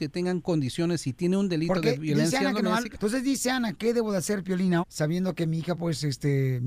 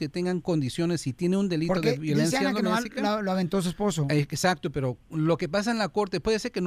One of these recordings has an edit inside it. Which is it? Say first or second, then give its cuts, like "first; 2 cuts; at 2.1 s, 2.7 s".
first; 2 cuts; at 2.9 s, 4.8 s